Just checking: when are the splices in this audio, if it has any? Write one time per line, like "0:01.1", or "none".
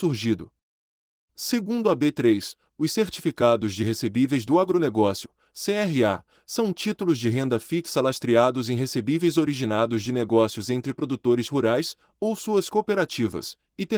none